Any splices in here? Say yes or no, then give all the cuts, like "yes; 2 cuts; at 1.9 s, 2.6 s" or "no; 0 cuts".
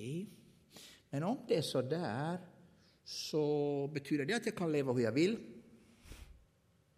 no; 0 cuts